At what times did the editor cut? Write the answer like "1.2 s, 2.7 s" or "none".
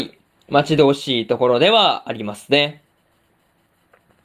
none